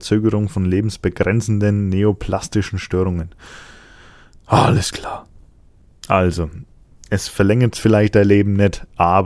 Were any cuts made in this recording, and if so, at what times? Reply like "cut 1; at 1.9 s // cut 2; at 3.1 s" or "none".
none